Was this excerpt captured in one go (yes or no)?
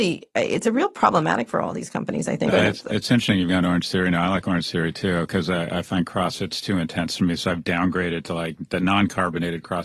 no